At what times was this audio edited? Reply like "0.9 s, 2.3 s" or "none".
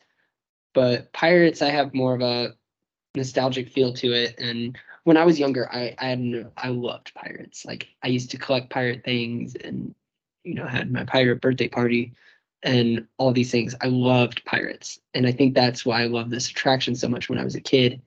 none